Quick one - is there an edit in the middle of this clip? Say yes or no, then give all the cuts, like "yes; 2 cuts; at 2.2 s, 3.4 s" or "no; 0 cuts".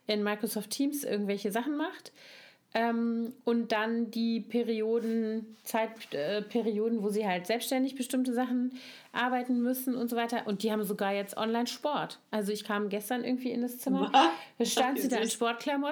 no; 0 cuts